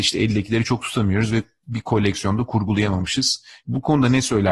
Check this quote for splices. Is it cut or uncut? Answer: cut